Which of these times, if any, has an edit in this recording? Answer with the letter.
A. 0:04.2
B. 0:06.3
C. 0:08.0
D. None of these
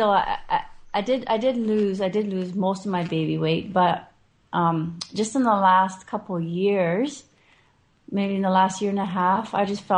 D